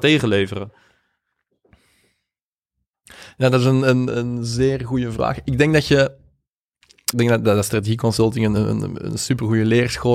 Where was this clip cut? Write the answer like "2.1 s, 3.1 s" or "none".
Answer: 4.1 s, 7.1 s